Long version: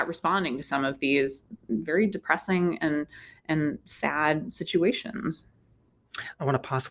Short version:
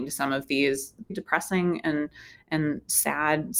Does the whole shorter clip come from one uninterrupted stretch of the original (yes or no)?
no